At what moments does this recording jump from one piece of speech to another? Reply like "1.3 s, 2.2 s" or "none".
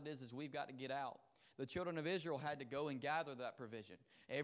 none